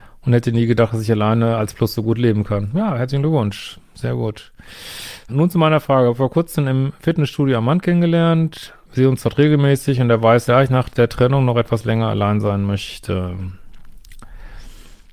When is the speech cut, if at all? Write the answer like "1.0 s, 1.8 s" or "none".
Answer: 5.3 s, 8.8 s, 10.5 s